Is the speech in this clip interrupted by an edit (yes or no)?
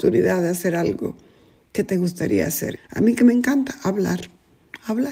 yes